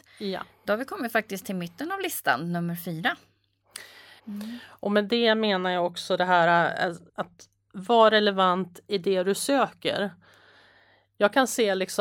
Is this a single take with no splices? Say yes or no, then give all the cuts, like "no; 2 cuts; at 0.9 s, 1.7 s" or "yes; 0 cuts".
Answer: no; 2 cuts; at 4.2 s, 7.1 s